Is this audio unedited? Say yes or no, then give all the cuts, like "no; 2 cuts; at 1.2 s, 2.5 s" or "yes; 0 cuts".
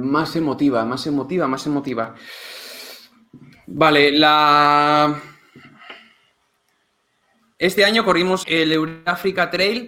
no; 1 cut; at 8.4 s